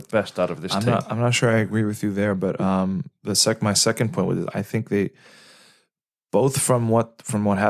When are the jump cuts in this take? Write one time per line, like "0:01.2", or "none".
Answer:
none